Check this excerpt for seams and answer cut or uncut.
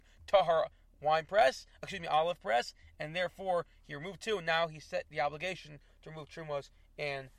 uncut